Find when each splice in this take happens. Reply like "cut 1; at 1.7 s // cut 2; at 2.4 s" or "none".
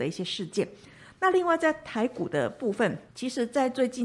cut 1; at 3.1 s